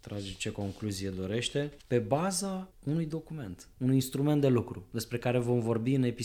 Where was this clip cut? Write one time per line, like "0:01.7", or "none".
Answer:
0:01.8
0:03.7